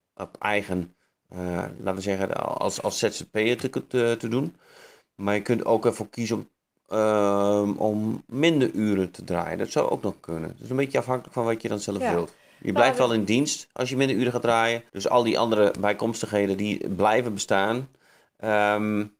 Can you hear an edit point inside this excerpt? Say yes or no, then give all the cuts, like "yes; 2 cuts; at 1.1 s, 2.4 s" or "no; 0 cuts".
yes; 1 cut; at 14.9 s